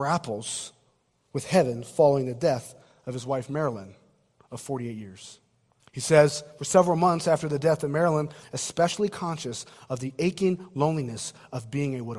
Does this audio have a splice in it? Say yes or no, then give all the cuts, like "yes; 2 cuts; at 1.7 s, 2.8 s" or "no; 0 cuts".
yes; 2 cuts; at 5.8 s, 8.4 s